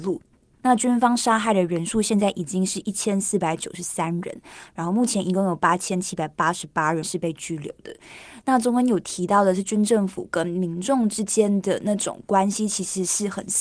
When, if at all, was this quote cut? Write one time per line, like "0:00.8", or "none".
none